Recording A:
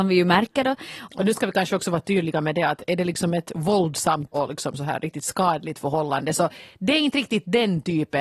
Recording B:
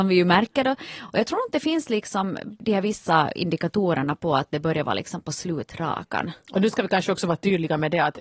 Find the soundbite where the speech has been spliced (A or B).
A